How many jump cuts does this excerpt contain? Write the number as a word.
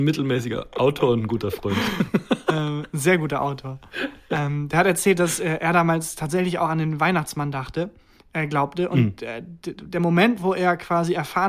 zero